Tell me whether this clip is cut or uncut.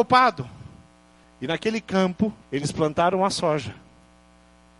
cut